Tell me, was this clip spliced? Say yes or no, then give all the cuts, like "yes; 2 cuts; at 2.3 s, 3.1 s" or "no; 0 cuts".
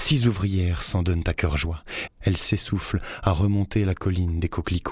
yes; 1 cut; at 2.1 s